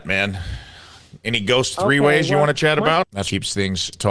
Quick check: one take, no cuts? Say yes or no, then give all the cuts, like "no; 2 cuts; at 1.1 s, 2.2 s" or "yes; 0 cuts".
no; 1 cut; at 3.0 s